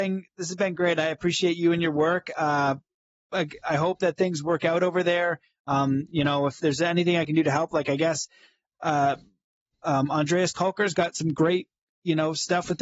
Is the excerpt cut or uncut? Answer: uncut